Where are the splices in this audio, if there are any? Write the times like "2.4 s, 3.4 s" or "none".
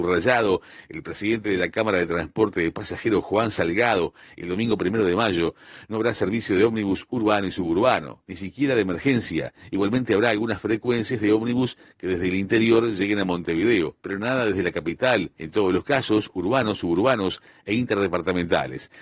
8.3 s, 15.4 s